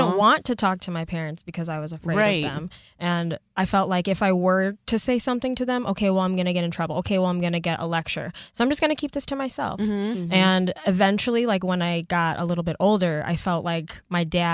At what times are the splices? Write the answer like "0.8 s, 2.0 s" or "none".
none